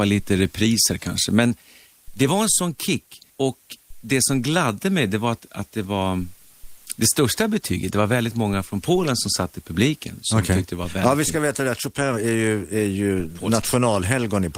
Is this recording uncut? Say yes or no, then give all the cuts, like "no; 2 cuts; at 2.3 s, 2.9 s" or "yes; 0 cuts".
no; 1 cut; at 3.3 s